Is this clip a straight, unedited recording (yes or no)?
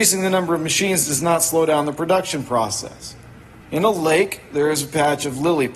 no